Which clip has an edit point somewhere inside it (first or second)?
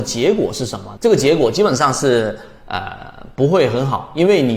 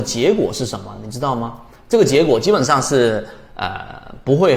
first